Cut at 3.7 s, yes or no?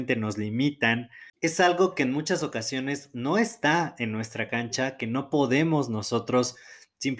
no